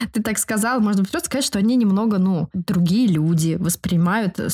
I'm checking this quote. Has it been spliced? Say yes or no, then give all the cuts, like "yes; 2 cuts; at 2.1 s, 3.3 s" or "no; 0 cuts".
no; 0 cuts